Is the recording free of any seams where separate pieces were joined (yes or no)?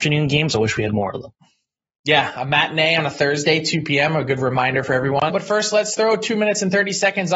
no